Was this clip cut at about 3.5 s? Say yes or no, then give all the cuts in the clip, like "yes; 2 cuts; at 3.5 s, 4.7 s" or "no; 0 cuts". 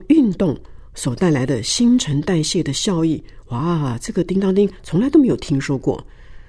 no; 0 cuts